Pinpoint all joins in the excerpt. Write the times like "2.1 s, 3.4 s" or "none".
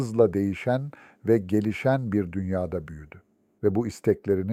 3.6 s